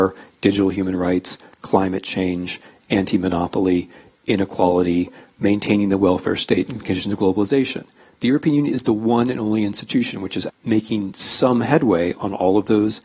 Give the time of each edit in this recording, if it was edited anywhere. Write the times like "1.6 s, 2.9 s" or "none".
10.5 s